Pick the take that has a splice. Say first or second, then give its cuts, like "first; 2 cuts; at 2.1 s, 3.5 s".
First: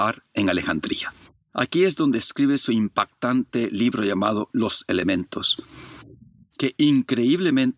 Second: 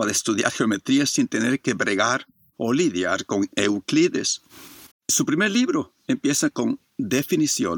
second; 1 cut; at 4.9 s